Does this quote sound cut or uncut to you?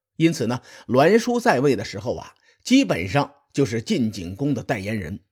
uncut